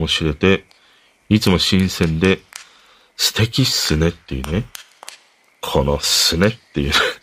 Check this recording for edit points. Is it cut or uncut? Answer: uncut